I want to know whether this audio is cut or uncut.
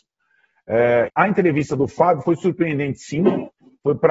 cut